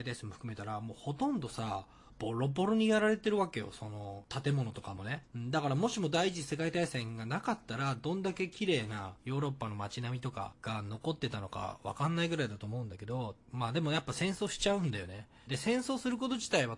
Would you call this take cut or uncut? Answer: cut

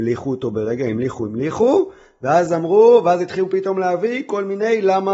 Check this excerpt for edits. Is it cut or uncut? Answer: cut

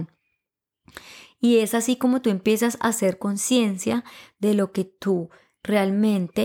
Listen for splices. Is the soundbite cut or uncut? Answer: uncut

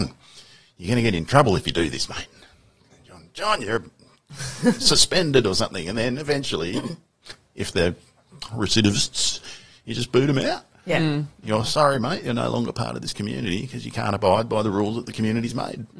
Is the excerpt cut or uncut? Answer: uncut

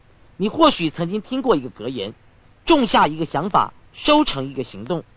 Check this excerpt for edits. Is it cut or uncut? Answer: uncut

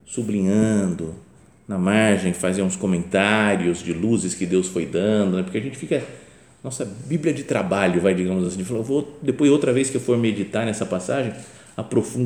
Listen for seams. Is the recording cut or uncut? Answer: uncut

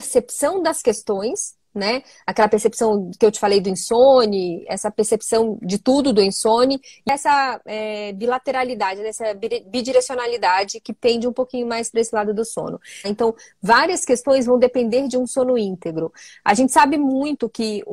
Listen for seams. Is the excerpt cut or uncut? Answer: cut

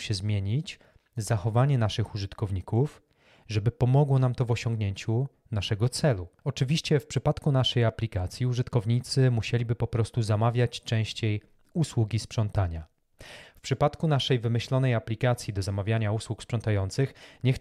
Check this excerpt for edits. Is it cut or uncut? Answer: cut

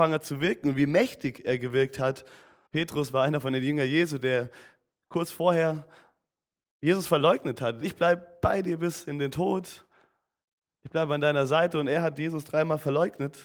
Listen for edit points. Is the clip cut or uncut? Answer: cut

